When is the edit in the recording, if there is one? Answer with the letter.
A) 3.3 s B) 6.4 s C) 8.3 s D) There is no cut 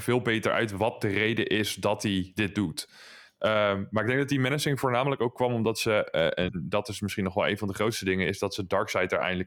A